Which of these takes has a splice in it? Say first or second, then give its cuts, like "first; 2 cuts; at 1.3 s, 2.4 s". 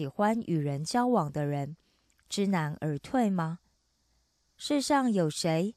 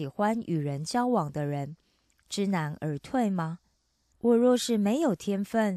second; 1 cut; at 4.1 s